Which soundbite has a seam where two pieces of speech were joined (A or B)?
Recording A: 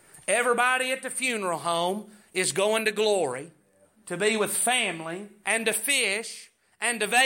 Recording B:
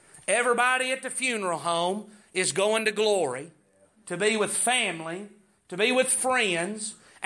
A